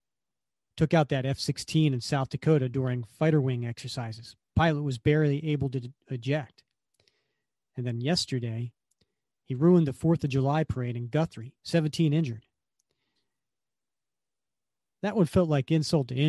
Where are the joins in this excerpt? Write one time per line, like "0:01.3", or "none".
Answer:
0:11.6